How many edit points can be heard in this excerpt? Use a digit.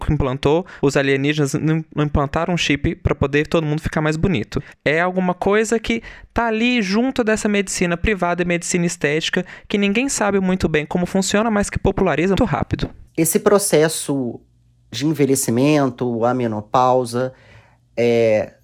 1